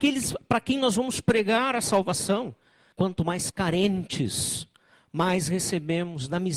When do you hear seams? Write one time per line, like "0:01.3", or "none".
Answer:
0:02.9